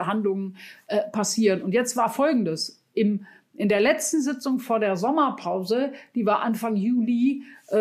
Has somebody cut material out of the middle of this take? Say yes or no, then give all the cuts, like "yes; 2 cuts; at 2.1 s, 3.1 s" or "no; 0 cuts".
no; 0 cuts